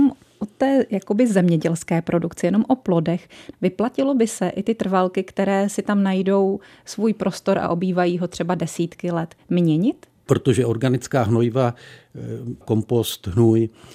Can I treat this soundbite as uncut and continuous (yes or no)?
no